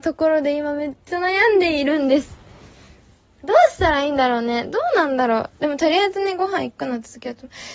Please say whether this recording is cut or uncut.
uncut